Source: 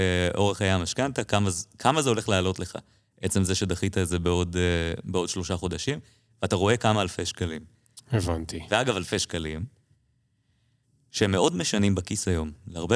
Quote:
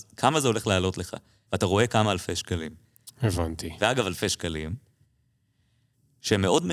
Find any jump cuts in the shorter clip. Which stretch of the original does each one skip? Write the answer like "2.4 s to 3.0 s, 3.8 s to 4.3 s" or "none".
3.1 s to 6.4 s